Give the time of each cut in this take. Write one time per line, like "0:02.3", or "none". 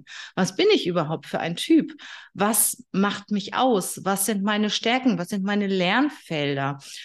none

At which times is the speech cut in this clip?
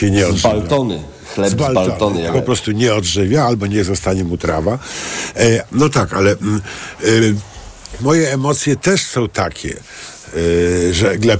0:02.3
0:05.7
0:08.0

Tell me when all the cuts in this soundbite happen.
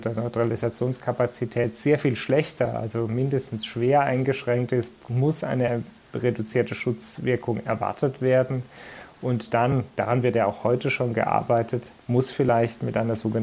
none

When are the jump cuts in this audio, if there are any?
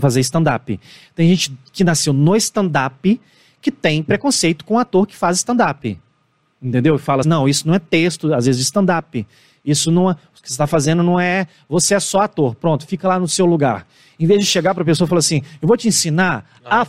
0:07.2

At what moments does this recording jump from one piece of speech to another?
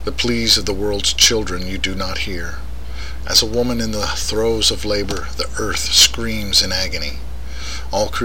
0:03.2

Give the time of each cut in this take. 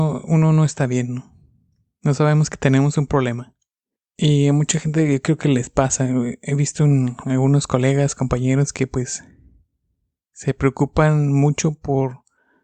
none

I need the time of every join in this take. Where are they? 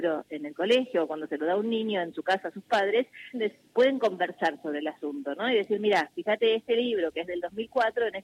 0:03.3

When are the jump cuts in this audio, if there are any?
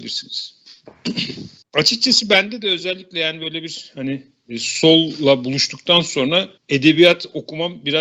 0:01.6
0:06.6

